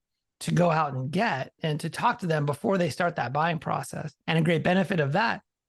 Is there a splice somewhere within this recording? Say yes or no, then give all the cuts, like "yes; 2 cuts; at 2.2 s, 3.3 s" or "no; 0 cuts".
yes; 2 cuts; at 1.6 s, 4.2 s